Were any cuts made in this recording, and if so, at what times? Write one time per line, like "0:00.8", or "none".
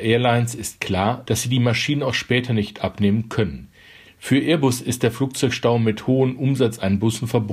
0:01.2
0:04.1